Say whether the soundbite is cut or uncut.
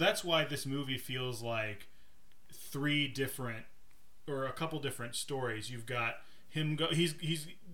uncut